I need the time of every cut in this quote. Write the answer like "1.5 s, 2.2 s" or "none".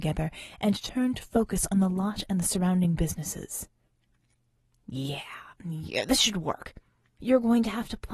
5.5 s, 7.2 s